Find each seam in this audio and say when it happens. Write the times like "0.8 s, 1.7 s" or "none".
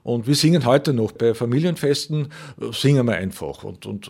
none